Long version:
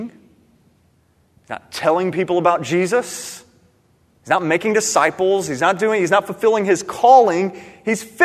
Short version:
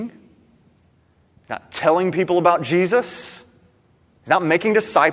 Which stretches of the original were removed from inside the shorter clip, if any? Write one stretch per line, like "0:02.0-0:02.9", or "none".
none

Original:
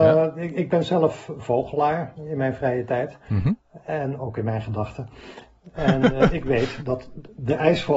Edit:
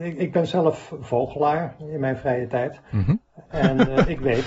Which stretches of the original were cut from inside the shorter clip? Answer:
0:03.8-0:05.7

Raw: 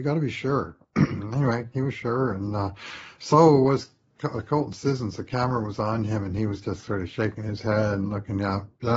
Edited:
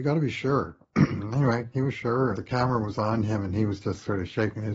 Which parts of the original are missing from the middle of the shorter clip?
0:02.3-0:05.2

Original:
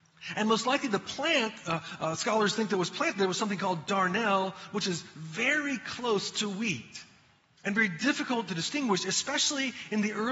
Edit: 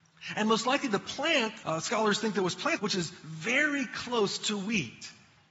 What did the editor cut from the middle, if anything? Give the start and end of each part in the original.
0:01.6-0:02.0
0:03.1-0:04.7

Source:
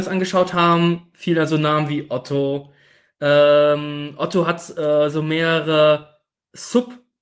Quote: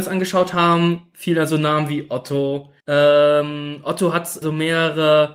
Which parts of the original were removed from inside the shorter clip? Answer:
0:02.8-0:03.1
0:04.7-0:05.1

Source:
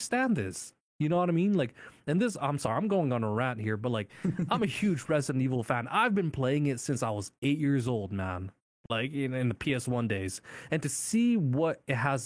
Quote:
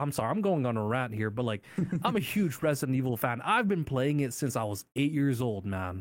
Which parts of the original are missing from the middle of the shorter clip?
none

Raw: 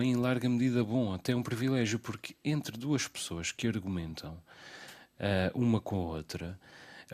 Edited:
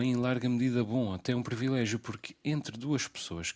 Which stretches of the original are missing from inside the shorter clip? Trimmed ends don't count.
none

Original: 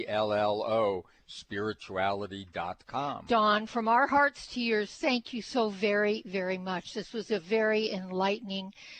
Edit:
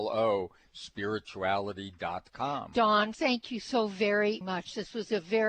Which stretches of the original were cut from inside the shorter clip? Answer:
0:03.7-0:05.0
0:06.2-0:06.6

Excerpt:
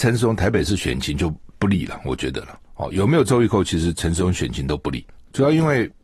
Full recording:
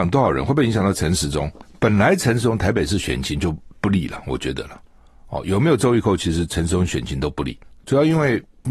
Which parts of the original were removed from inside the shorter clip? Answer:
0:04.9-0:05.2

